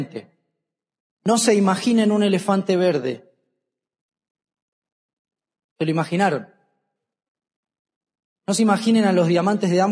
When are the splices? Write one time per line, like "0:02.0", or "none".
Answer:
none